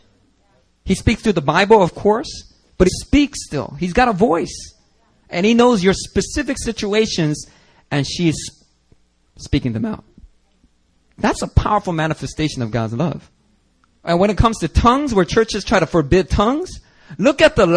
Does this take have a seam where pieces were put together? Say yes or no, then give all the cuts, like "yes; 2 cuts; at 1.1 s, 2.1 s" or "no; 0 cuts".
yes; 2 cuts; at 2.9 s, 14.0 s